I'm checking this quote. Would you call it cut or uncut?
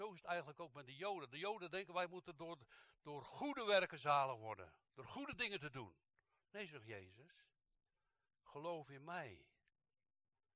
uncut